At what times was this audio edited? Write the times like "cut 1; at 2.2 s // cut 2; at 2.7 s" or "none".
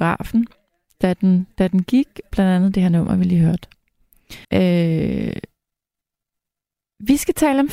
cut 1; at 2.3 s // cut 2; at 4.4 s